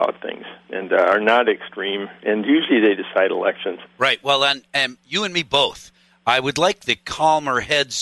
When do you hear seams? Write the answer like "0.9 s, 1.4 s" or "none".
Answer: 3.8 s